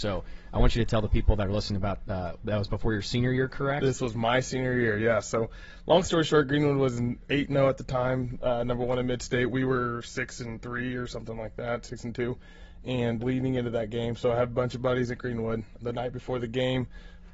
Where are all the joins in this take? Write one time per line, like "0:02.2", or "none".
0:13.2
0:15.8